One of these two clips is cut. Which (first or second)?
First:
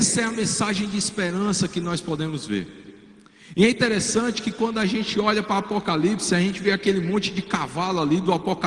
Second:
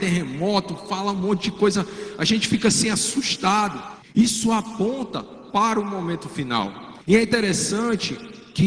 second